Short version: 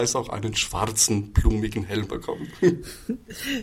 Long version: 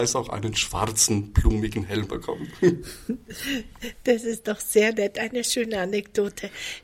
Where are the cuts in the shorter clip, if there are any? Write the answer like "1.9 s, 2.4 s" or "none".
none